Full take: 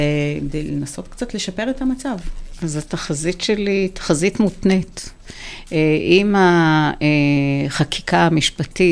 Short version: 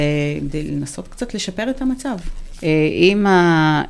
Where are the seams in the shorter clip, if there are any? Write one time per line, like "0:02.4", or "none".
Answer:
0:02.6